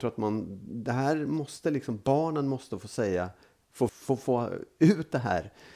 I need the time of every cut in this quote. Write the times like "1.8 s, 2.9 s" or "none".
3.9 s